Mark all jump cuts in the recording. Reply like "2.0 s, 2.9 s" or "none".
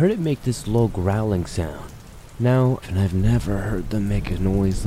2.8 s